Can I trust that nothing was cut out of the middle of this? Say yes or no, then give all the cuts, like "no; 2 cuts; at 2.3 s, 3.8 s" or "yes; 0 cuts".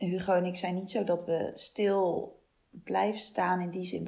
yes; 0 cuts